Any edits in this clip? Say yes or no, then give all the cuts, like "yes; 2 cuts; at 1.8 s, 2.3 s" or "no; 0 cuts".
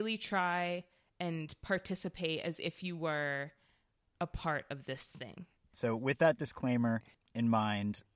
yes; 1 cut; at 5.7 s